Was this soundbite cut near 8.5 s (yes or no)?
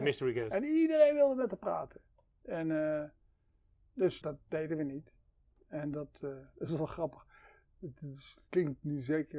no